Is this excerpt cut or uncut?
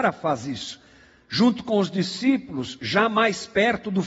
uncut